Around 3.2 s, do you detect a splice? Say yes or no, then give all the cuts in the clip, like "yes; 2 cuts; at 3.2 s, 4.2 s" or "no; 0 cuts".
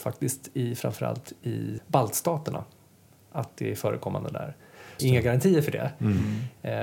no; 2 cuts; at 1.8 s, 5.0 s